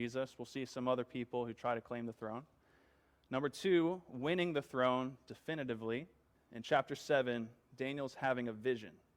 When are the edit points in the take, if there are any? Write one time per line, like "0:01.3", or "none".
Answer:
0:06.3